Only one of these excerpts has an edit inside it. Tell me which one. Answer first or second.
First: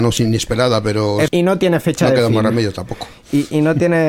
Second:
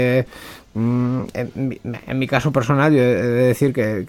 first